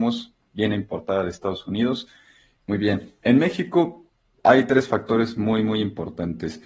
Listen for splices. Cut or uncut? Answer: cut